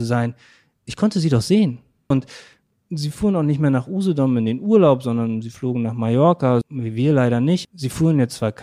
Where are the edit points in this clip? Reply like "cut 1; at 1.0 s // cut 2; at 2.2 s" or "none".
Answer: cut 1; at 2.1 s // cut 2; at 6.6 s // cut 3; at 7.6 s